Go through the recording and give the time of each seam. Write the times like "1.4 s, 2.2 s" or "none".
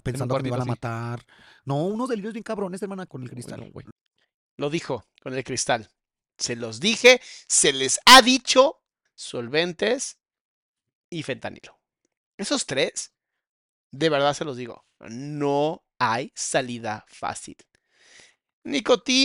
3.1 s, 9.1 s